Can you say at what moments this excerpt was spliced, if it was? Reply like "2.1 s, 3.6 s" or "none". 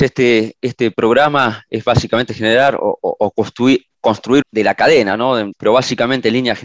4.4 s, 5.5 s